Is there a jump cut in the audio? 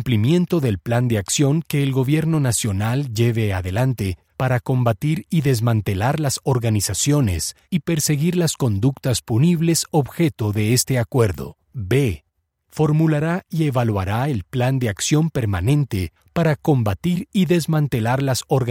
yes; 1 cut; at 11.6 s

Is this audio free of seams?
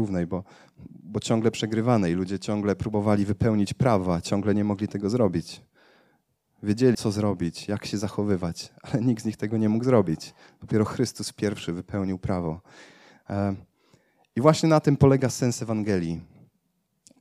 no; 1 cut; at 6.9 s

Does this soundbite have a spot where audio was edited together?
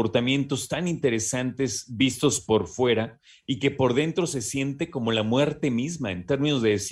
no; 0 cuts

